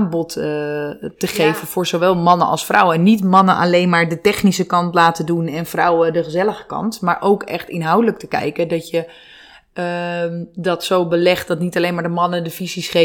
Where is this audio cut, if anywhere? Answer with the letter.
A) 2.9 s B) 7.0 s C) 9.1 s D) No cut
D